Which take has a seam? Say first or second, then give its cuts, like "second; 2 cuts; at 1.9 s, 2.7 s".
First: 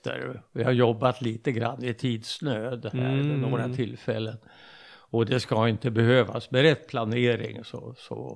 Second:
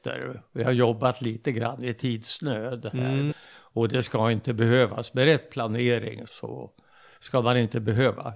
second; 2 cuts; at 3.3 s, 6.3 s